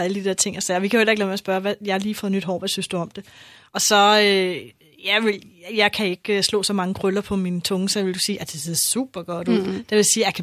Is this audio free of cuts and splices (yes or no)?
yes